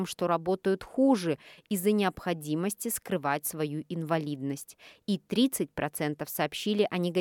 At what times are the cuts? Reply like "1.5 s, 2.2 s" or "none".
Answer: none